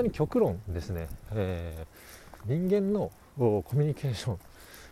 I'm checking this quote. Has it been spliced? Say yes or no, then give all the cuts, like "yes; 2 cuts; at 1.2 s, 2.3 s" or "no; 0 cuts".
yes; 1 cut; at 2.4 s